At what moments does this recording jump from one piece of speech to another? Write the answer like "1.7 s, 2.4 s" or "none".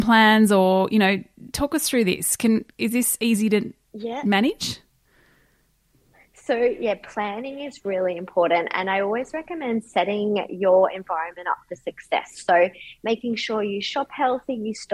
none